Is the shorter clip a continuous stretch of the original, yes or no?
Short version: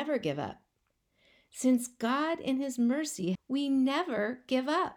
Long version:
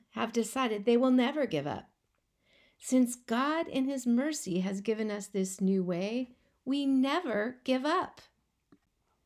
no